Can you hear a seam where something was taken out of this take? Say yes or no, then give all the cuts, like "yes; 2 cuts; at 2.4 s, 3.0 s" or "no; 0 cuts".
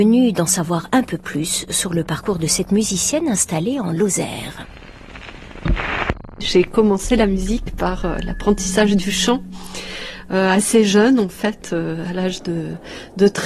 no; 0 cuts